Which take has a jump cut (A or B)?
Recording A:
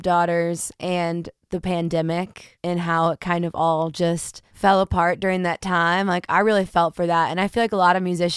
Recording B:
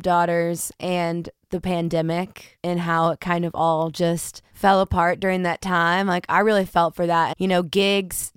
B